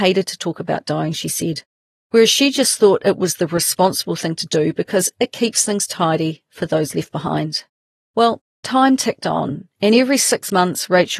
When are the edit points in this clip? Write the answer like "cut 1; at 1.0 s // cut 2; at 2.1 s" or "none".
none